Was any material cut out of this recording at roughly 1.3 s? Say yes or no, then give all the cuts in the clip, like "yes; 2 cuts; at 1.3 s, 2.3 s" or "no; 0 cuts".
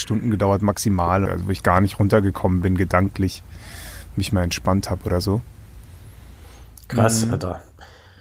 yes; 1 cut; at 1.3 s